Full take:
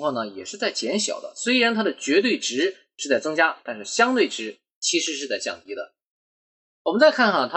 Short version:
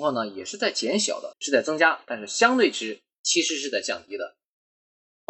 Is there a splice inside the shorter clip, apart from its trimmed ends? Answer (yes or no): yes